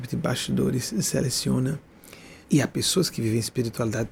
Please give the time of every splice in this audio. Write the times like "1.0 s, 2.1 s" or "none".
2.4 s